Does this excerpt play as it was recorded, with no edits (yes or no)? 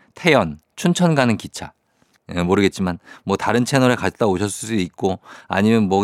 no